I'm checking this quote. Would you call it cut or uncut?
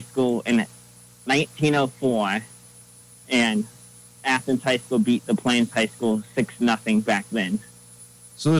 uncut